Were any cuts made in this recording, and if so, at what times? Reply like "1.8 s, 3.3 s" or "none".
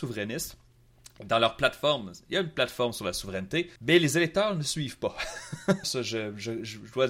3.8 s, 5.8 s